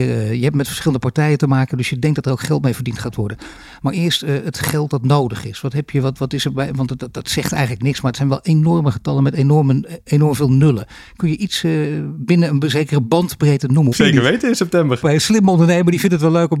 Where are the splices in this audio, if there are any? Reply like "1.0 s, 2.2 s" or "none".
1.7 s, 13.9 s, 15.0 s

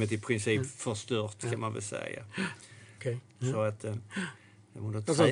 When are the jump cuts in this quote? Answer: 3.0 s

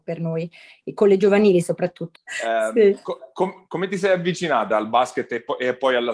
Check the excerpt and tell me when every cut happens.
2.1 s

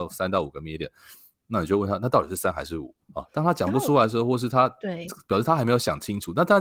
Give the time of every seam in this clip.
3.0 s

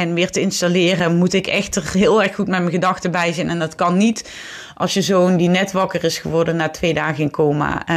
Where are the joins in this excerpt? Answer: none

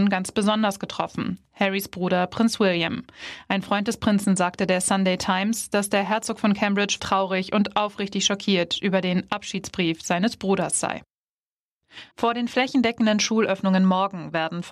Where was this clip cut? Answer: 7.0 s, 12.1 s

